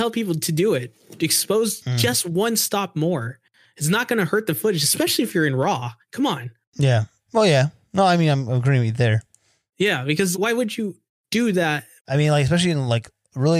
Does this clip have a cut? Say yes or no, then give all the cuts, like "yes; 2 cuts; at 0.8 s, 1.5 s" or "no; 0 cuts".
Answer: yes; 2 cuts; at 10.3 s, 12.0 s